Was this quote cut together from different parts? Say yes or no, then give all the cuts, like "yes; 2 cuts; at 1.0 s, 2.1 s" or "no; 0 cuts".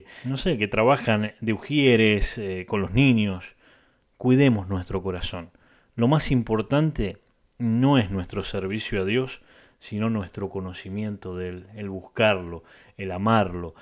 no; 0 cuts